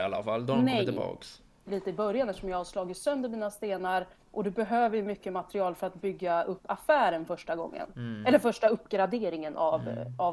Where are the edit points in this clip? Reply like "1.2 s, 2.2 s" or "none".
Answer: 1.6 s